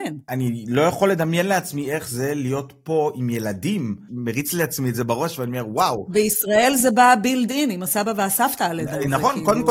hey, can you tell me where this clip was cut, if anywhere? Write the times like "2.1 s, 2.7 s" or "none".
4.1 s